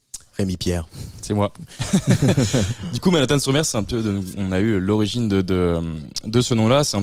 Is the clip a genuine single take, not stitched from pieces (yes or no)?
yes